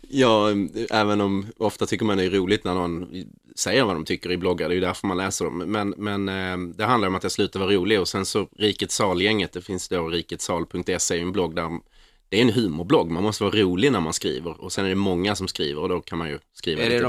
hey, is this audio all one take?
yes; 0 cuts

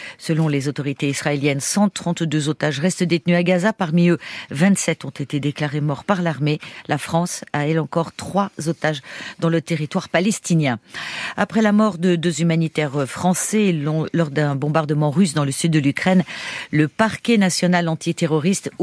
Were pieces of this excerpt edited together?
no; 0 cuts

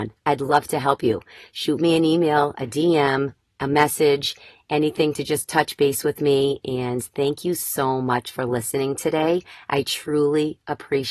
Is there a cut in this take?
no; 0 cuts

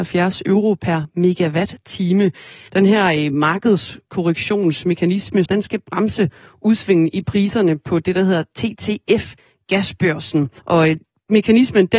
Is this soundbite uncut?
no; 3 cuts; at 2.7 s, 5.5 s, 10.6 s

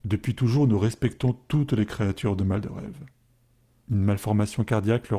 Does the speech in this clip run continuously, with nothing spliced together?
no; 1 cut; at 3.8 s

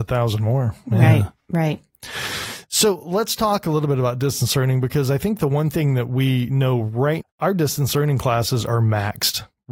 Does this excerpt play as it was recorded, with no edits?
no; 1 cut; at 7.2 s

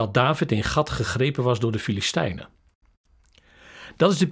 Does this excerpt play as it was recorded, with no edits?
yes; 0 cuts

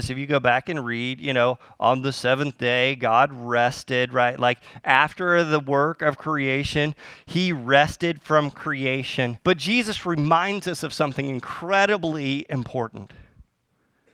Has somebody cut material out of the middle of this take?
yes; 1 cut; at 9.4 s

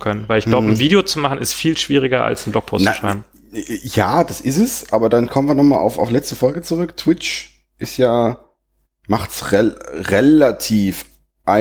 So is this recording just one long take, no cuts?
yes; 0 cuts

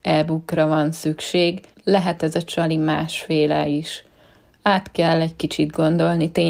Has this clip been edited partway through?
no; 0 cuts

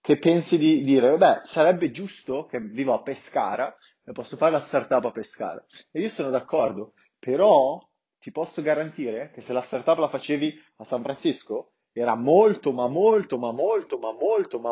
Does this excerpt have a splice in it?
no; 0 cuts

